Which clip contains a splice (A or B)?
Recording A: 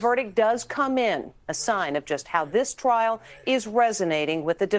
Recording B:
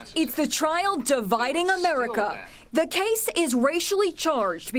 B